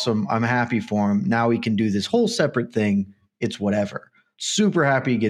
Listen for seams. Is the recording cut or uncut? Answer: cut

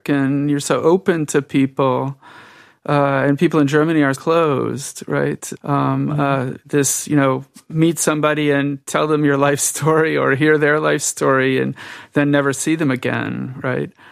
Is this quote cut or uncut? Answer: cut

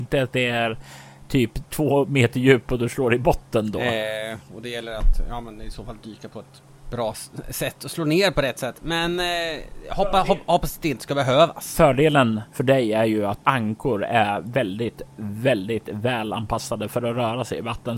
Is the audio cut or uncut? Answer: cut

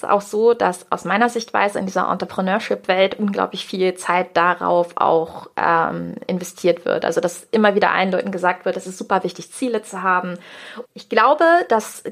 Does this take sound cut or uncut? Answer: cut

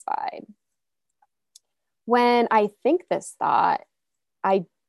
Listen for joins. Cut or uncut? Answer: uncut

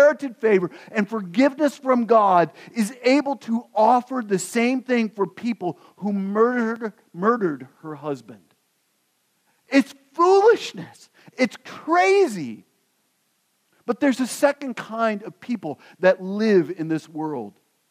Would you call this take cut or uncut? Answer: uncut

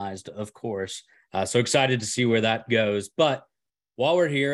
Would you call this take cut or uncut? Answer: cut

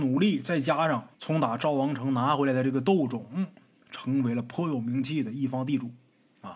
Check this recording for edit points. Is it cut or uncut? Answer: cut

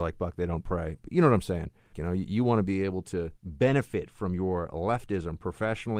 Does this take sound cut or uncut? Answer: cut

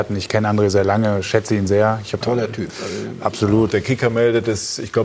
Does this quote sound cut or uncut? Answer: cut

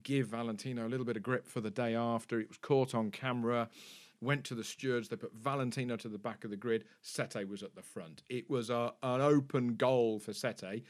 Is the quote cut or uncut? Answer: uncut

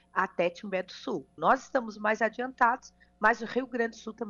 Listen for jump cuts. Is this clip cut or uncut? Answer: cut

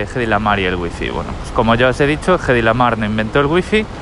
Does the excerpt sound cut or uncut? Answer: uncut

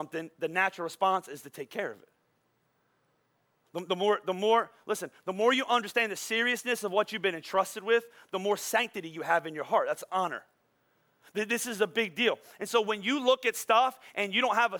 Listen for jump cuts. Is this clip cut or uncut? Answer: uncut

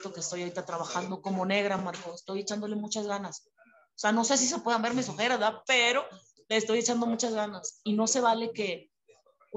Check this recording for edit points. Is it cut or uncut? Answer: uncut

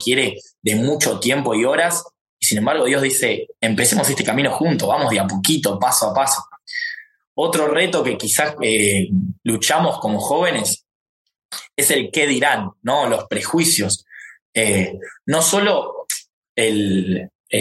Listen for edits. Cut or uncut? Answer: uncut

